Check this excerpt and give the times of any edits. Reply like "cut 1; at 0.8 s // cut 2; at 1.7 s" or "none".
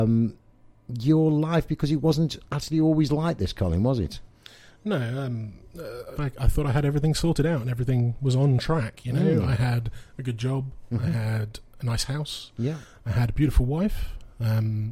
cut 1; at 6.2 s